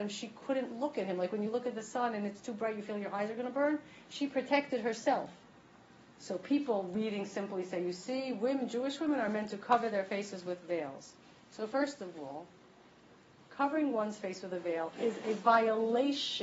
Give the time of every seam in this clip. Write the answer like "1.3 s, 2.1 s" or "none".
6.1 s